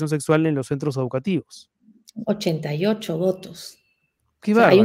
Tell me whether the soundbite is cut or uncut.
uncut